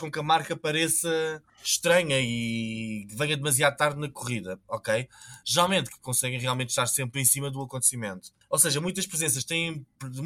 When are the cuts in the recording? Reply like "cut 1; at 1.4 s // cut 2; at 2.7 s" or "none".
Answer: cut 1; at 5.9 s // cut 2; at 7.1 s // cut 3; at 8.5 s

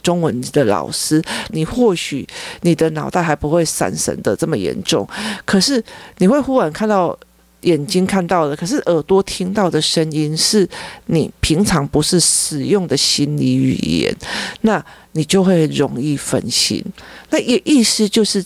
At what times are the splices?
cut 1; at 1.5 s

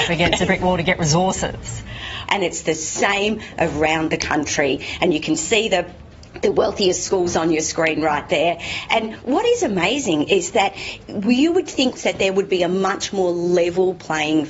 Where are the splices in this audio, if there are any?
cut 1; at 2.3 s // cut 2; at 12.0 s

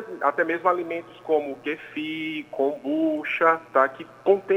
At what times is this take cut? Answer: cut 1; at 3.7 s

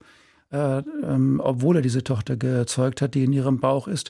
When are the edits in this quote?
none

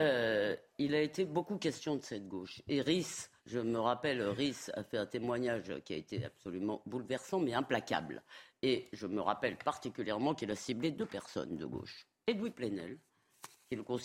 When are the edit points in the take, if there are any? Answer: cut 1; at 3.4 s

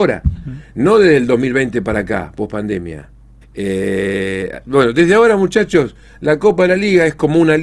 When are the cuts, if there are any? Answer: cut 1; at 3.4 s

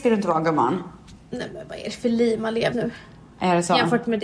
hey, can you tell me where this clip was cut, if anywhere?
cut 1; at 2.7 s

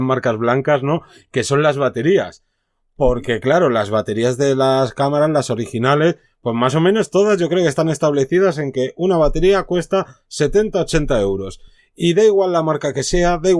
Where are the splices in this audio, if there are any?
none

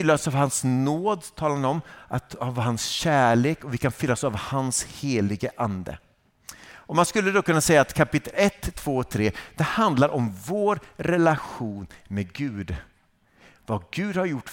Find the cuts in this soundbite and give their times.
none

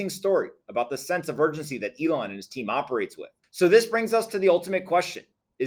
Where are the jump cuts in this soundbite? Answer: cut 1; at 3.4 s

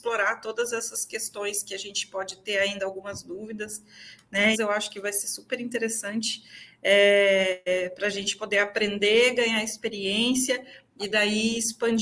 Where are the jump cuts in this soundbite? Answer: cut 1; at 4.5 s

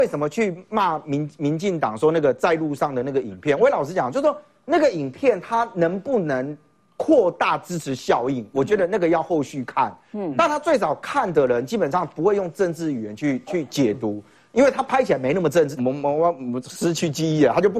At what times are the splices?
cut 1; at 15.8 s

